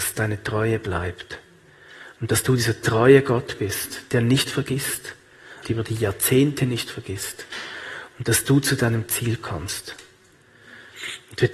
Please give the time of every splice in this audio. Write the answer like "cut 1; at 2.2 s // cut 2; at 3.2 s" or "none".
cut 1; at 5.6 s

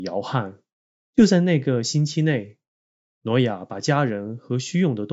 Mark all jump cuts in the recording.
cut 1; at 1.1 s

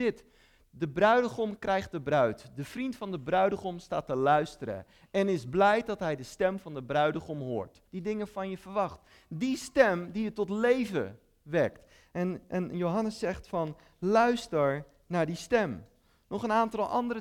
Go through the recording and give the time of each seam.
cut 1; at 7.9 s

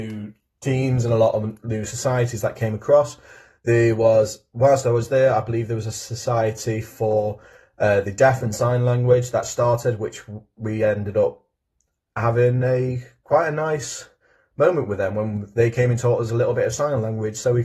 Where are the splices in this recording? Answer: none

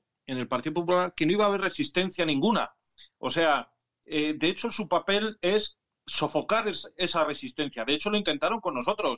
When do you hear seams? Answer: none

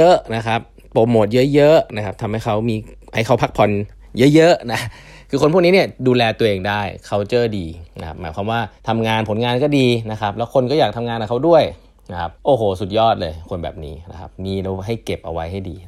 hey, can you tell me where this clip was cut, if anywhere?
cut 1; at 8.8 s // cut 2; at 12.4 s

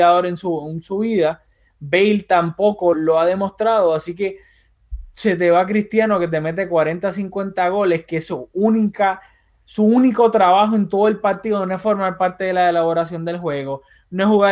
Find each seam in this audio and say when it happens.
cut 1; at 2.9 s

